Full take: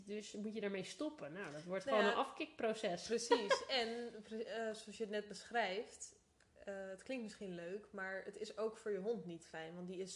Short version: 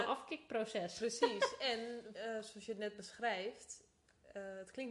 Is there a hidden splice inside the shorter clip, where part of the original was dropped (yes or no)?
yes